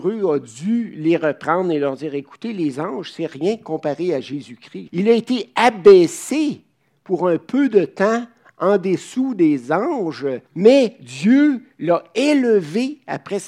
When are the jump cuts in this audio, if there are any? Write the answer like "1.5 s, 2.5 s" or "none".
4.9 s, 10.5 s